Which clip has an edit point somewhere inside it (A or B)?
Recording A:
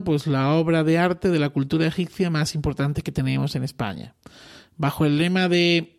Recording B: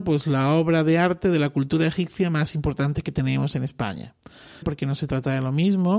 B